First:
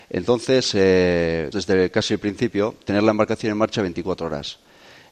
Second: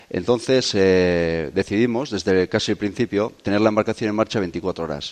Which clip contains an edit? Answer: first; 1 cut; at 1.5 s

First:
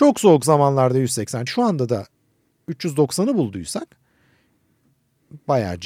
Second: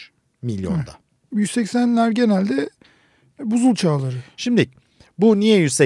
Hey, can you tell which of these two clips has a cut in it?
first; 1 cut; at 1.5 s

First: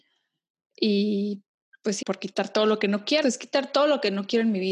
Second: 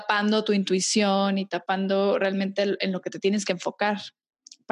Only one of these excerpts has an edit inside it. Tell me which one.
first; 2 cuts; at 2.0 s, 3.2 s

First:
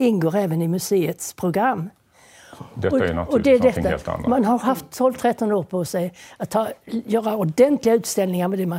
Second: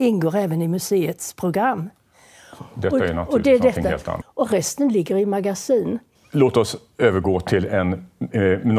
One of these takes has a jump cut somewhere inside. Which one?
second; 2 cuts; at 4.2 s, 6.1 s

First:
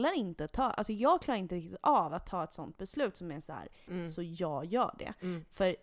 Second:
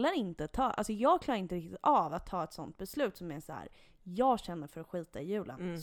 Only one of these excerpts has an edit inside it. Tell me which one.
first; 1 cut; at 3.9 s

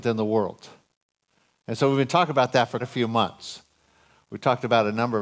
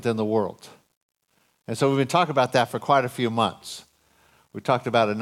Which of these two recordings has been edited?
first; 1 cut; at 2.8 s

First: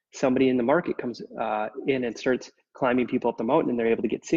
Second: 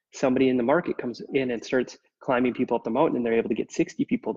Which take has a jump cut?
second; 1 cut; at 1.3 s

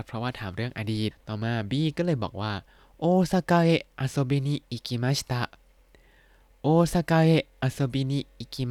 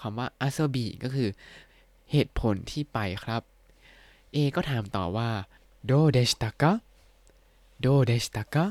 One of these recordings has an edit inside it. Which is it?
first; 1 cut; at 1.1 s

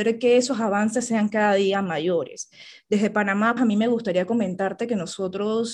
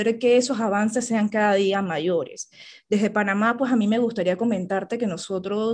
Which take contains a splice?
first; 1 cut; at 3.6 s

